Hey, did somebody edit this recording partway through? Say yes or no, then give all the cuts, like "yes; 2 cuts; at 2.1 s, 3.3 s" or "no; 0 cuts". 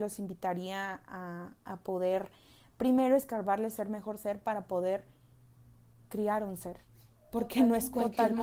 no; 0 cuts